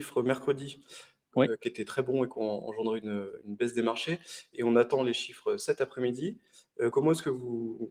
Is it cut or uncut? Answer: uncut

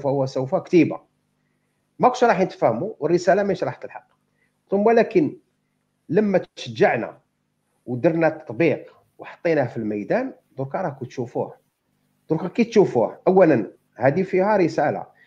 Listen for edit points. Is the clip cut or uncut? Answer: uncut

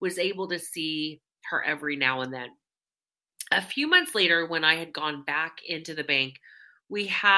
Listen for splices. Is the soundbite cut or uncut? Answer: uncut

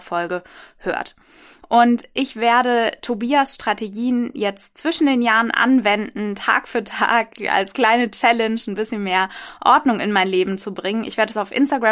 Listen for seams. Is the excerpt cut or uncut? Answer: uncut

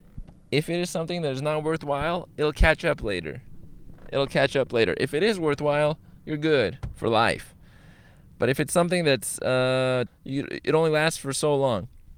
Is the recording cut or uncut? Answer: cut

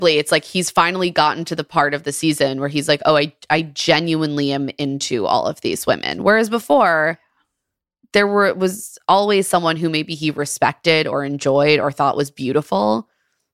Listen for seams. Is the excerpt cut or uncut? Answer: uncut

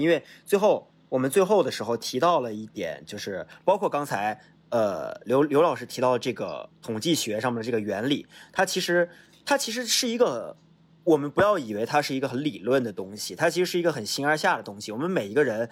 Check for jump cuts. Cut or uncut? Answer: uncut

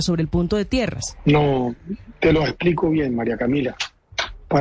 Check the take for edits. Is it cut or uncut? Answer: uncut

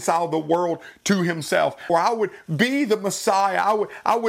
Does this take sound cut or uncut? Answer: cut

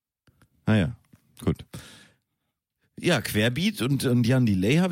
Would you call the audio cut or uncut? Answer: uncut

